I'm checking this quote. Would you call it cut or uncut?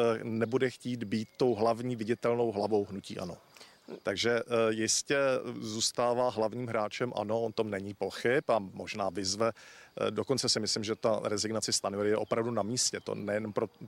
cut